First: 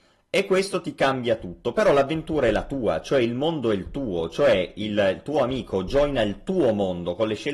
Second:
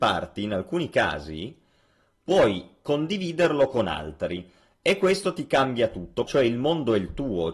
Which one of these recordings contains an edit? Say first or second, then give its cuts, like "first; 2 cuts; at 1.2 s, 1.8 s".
second; 1 cut; at 6.3 s